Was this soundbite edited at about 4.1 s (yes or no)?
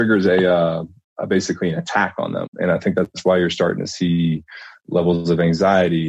no